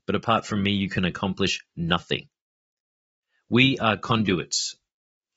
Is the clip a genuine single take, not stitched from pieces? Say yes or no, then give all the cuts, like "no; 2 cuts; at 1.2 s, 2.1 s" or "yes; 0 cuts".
yes; 0 cuts